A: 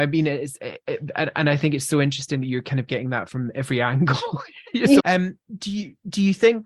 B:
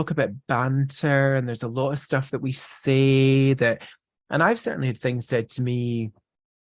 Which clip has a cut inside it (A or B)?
A